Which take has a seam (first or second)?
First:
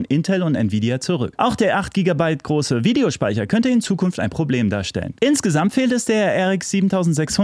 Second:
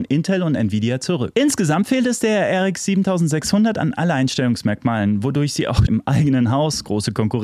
second